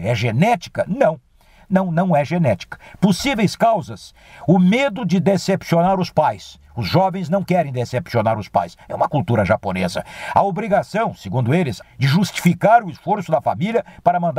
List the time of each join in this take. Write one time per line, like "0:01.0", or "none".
0:11.8